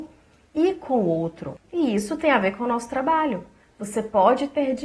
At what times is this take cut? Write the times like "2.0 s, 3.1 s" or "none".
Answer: 1.6 s

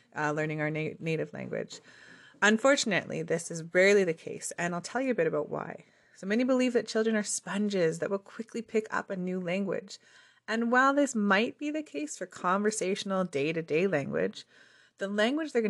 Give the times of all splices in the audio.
none

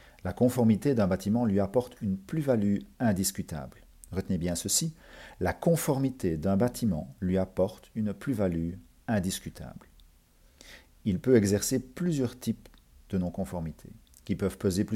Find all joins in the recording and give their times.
none

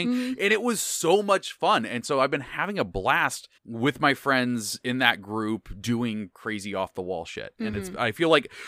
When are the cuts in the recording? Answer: 3.6 s, 5.8 s

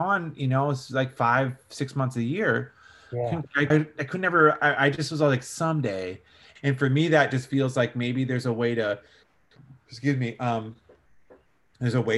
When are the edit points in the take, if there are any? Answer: 3.7 s, 6.6 s

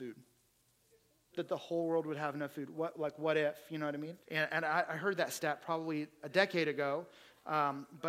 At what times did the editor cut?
4.2 s

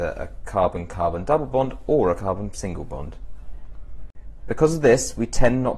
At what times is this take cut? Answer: 2.2 s, 4.4 s

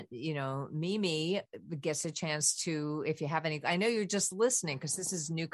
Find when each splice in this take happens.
none

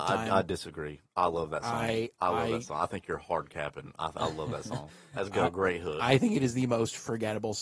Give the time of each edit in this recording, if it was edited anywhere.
none

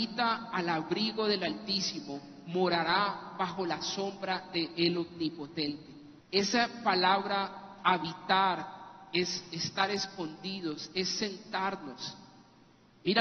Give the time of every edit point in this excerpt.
6.2 s

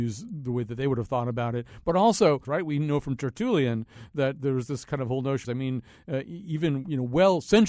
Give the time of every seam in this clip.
2.4 s, 5.4 s

